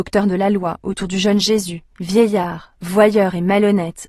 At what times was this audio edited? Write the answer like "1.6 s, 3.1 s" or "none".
1.9 s